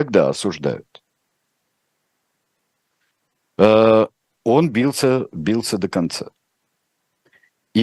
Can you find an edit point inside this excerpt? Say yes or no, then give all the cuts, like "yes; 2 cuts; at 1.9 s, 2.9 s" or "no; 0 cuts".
no; 0 cuts